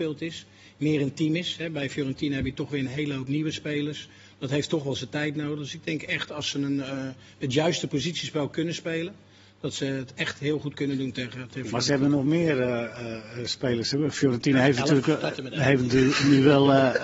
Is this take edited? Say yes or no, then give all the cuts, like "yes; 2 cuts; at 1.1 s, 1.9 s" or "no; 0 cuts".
no; 0 cuts